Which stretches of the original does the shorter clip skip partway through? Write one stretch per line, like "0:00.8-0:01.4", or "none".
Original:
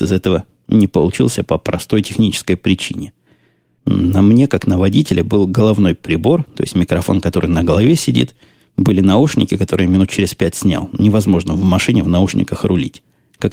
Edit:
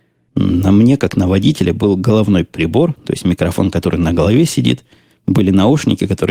none